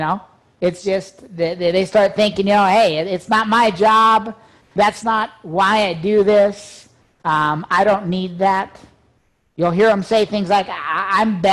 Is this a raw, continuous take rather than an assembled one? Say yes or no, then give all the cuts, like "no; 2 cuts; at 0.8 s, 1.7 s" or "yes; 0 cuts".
yes; 0 cuts